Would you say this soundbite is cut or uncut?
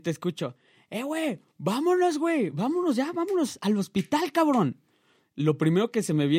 uncut